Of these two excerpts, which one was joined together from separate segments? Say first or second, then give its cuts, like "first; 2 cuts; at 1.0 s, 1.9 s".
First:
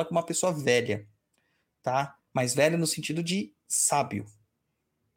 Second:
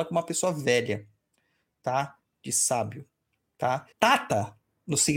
second; 2 cuts; at 2.2 s, 3.9 s